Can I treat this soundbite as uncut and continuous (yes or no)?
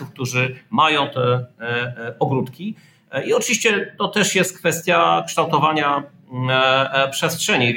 yes